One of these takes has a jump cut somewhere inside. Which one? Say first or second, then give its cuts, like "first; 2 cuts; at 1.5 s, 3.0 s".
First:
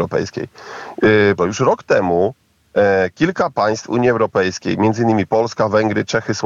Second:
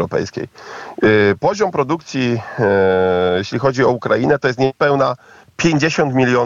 first; 1 cut; at 1.4 s